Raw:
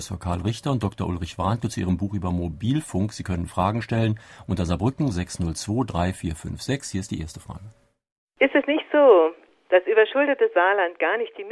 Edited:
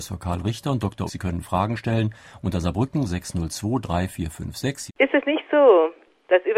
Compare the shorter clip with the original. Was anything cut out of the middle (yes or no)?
yes